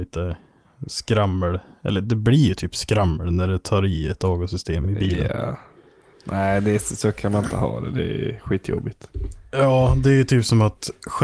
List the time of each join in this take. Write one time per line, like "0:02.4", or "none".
none